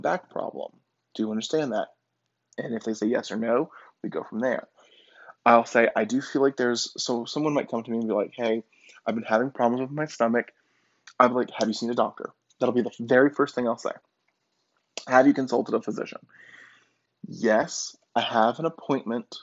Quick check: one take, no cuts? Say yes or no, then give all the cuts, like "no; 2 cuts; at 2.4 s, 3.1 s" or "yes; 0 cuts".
yes; 0 cuts